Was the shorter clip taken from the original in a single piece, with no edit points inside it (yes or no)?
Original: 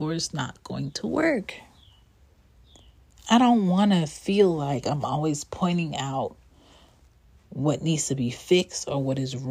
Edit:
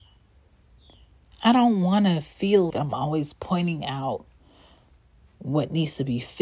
no